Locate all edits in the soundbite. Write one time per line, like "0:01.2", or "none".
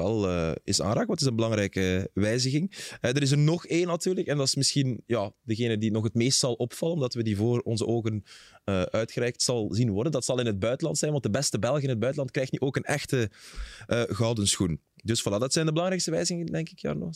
none